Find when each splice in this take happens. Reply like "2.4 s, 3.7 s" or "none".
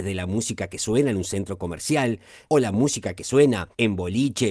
2.5 s

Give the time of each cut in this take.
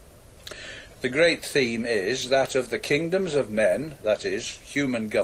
0.9 s

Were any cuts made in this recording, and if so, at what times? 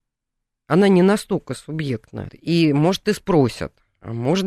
2.3 s

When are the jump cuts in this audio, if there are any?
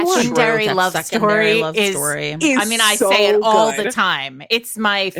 none

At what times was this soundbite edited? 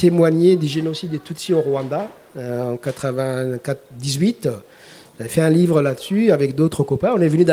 none

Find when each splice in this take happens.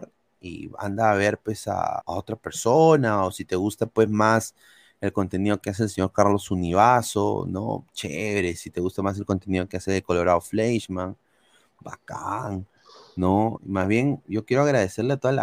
2.0 s, 13.6 s

